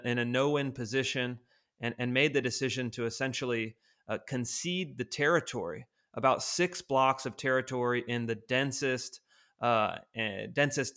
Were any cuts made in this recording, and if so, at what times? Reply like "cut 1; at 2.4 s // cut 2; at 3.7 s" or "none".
none